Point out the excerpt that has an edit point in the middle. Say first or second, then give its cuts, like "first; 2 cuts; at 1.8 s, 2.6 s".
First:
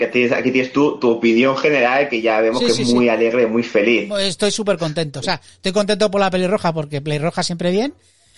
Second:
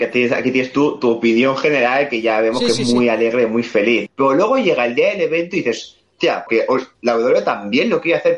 second; 2 cuts; at 4.1 s, 6.5 s